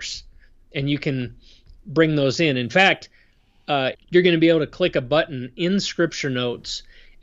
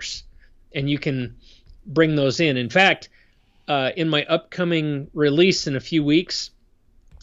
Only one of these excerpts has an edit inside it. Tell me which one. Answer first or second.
first